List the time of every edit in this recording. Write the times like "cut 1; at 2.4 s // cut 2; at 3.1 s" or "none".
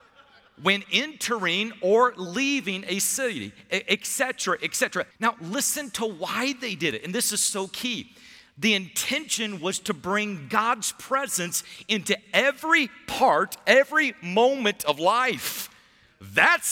cut 1; at 5.1 s